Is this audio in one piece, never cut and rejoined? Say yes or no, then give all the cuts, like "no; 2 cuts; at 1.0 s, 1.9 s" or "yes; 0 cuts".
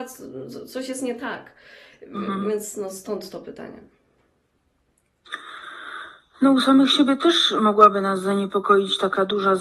yes; 0 cuts